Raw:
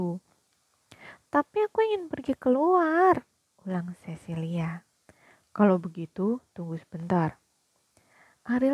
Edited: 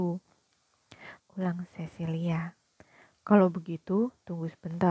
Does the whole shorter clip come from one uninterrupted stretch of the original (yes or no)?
no